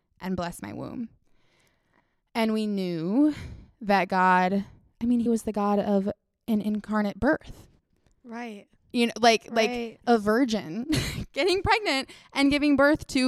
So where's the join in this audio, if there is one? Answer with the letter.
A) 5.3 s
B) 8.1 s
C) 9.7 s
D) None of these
A